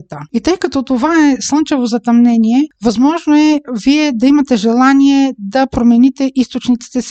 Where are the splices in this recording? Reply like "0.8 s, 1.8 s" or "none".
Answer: none